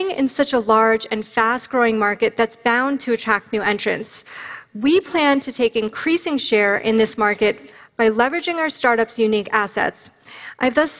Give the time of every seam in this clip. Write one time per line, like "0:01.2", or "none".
none